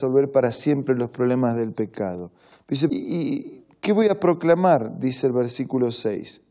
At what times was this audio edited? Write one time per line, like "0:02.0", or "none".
0:02.9